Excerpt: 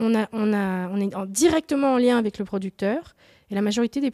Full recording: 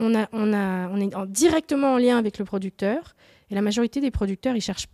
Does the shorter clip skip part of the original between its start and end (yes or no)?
no